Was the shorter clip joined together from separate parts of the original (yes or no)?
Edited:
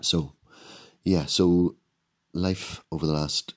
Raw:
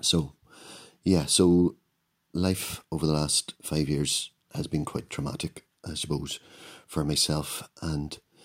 no